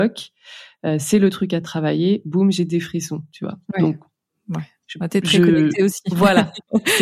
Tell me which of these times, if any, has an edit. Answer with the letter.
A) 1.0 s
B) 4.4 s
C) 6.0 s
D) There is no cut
D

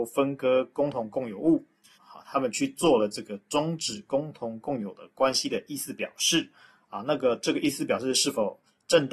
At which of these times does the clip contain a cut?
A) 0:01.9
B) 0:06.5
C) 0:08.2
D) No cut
A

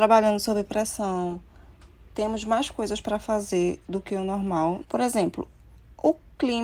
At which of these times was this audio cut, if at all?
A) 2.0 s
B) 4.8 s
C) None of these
B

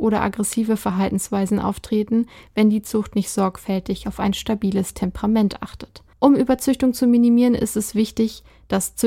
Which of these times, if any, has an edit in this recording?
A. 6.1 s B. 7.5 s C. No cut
A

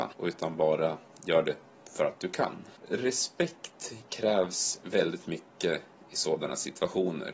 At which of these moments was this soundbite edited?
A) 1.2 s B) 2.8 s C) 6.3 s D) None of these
D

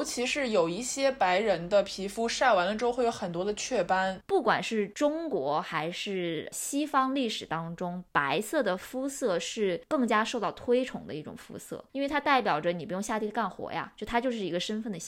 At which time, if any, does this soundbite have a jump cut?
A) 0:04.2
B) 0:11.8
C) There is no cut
A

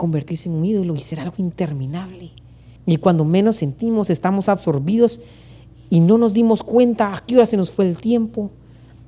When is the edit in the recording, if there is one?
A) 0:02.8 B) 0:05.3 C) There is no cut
A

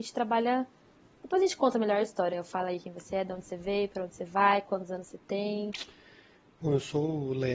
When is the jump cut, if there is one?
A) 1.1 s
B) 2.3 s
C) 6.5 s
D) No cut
B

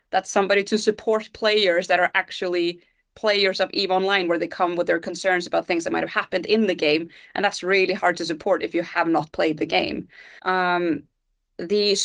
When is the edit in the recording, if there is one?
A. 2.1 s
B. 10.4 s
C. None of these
B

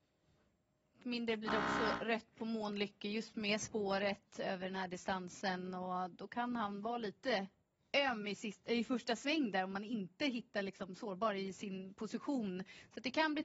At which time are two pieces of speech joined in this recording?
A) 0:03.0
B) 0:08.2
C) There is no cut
C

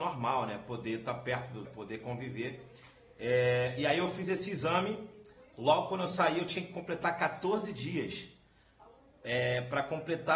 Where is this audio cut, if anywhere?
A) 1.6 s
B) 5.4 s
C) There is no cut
A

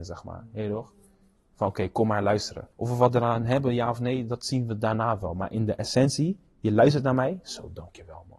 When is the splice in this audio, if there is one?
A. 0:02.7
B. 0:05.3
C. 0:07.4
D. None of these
A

